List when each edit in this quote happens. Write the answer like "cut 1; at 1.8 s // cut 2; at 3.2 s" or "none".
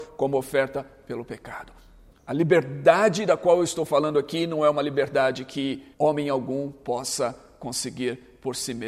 cut 1; at 2.1 s // cut 2; at 5.9 s